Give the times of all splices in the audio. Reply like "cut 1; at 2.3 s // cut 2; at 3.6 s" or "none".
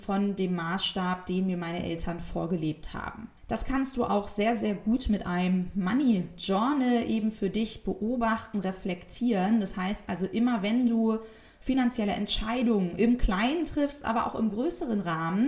cut 1; at 3.4 s